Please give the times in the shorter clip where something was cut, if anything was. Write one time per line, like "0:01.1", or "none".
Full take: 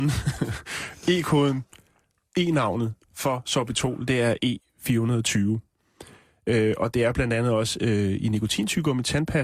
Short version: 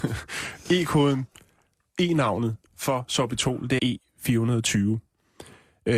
0:03.8